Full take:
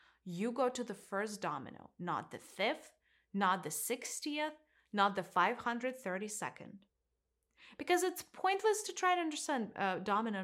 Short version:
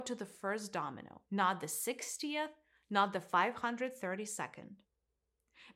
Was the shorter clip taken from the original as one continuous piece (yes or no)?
no